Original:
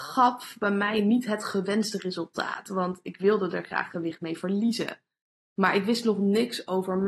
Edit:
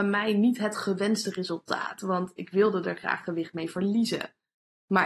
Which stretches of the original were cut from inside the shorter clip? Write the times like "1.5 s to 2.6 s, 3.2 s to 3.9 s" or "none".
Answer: none

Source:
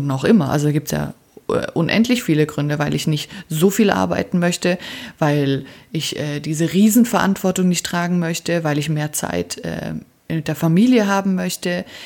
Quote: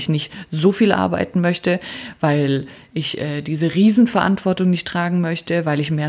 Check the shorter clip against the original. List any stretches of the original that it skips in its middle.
none

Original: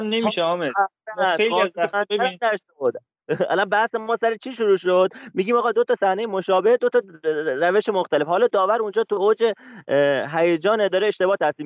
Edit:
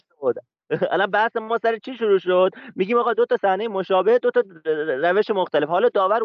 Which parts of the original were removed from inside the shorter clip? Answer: none

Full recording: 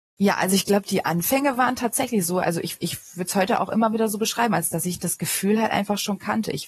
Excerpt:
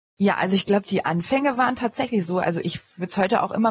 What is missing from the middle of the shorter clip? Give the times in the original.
2.6 s to 2.8 s

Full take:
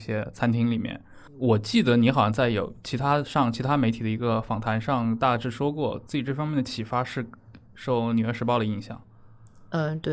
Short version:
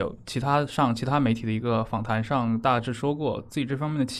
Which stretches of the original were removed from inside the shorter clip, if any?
none

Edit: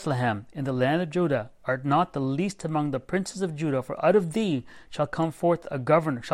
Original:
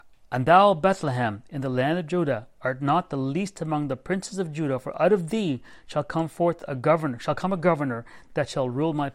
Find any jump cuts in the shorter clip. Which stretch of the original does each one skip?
none

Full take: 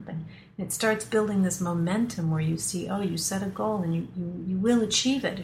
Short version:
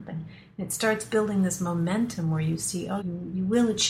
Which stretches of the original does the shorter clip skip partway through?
3.0 s to 4.1 s

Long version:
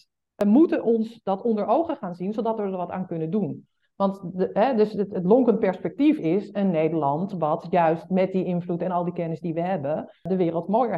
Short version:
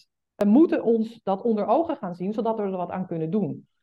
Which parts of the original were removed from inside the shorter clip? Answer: none

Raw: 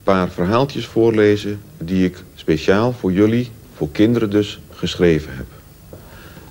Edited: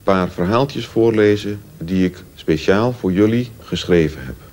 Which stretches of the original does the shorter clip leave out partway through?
3.6 s to 4.7 s

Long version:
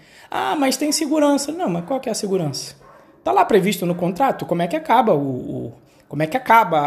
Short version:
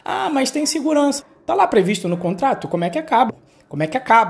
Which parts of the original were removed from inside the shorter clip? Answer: 1.5 s to 3.0 s, 5.1 s to 5.7 s

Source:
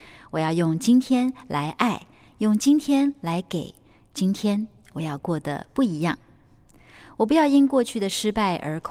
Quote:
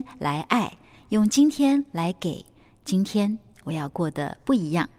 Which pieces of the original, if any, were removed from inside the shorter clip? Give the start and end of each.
none

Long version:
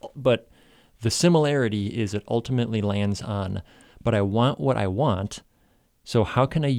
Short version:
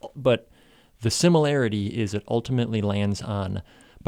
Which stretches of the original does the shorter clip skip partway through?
none

